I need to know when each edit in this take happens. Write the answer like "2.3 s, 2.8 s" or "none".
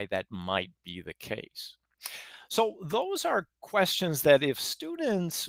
none